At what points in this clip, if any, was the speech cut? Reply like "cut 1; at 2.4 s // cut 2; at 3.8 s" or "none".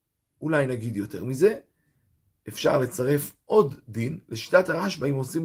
none